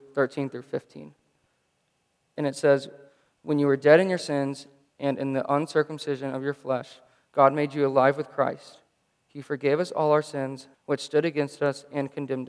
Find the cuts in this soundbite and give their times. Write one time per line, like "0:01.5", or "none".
0:10.7